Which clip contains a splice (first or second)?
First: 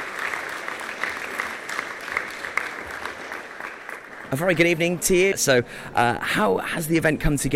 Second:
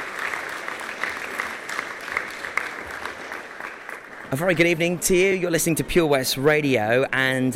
first